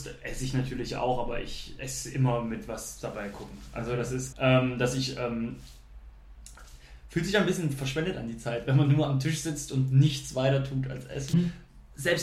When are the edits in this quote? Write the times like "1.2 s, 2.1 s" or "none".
4.3 s, 11.3 s